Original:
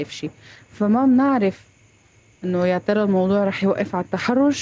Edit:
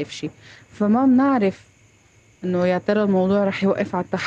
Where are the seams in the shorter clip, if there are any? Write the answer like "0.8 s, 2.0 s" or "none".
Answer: none